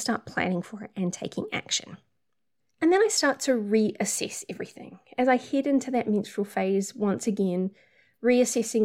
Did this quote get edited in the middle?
no; 0 cuts

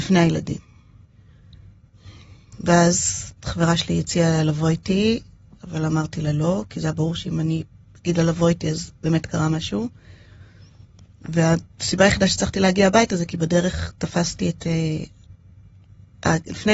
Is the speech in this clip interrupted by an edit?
no; 0 cuts

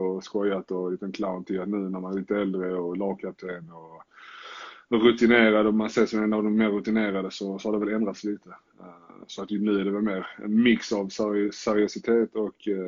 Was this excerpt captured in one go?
yes; 0 cuts

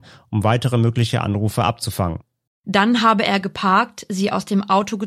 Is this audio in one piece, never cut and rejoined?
no; 1 cut; at 2.5 s

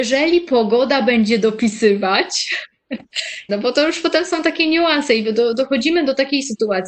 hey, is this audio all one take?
no; 1 cut; at 3.5 s

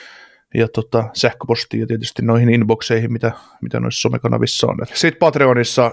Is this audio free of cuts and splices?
no; 1 cut; at 4.8 s

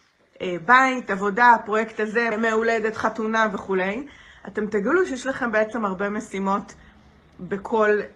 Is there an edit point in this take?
yes; 1 cut; at 2.3 s

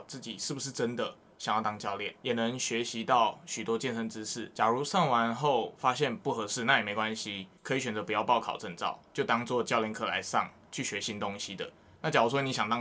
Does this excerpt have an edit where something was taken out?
yes; 1 cut; at 7.6 s

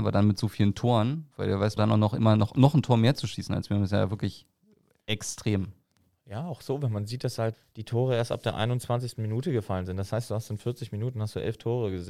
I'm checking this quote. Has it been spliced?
yes; 1 cut; at 1.8 s

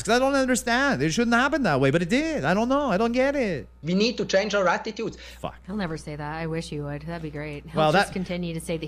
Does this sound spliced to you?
yes; 1 cut; at 5.6 s

